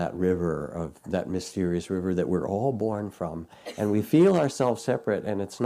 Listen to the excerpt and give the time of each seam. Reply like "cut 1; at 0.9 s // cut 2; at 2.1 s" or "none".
none